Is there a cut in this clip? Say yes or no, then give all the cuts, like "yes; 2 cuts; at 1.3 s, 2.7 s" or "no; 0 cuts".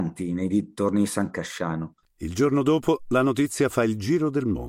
yes; 1 cut; at 2.0 s